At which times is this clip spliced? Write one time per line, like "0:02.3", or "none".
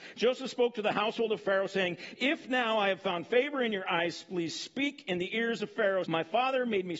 0:06.0